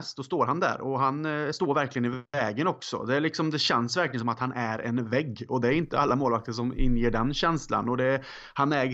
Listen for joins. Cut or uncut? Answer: uncut